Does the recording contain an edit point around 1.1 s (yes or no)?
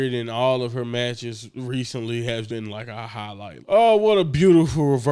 no